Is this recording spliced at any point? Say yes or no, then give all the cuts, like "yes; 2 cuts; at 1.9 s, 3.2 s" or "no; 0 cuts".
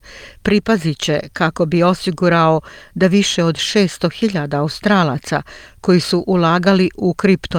no; 0 cuts